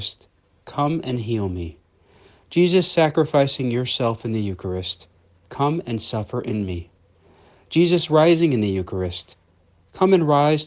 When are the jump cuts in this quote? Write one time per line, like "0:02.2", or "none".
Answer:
none